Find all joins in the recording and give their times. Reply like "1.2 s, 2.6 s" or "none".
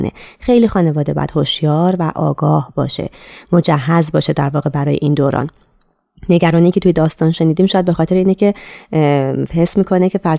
none